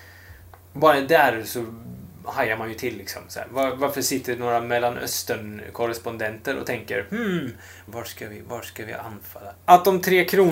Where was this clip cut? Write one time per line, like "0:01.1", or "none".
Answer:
0:07.9
0:09.6